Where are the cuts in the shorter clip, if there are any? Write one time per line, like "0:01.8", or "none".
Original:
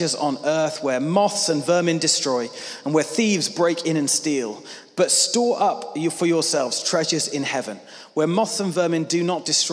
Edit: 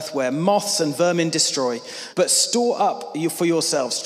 0:02.1